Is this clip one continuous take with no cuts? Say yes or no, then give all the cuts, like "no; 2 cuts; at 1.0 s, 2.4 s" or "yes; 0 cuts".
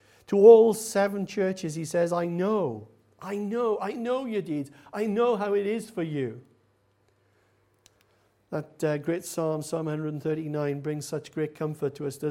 yes; 0 cuts